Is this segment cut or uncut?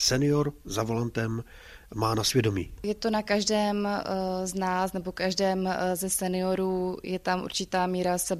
cut